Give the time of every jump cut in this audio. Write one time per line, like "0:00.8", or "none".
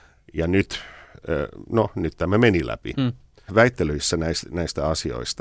0:03.5